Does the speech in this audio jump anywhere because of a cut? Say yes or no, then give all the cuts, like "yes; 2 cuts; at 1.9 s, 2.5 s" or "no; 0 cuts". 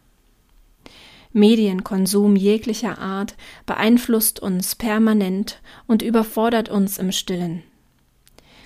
no; 0 cuts